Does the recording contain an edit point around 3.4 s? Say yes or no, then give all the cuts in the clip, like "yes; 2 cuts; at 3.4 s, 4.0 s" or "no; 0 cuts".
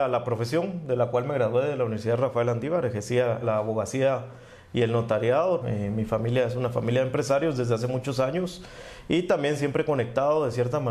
yes; 2 cuts; at 3.4 s, 5.6 s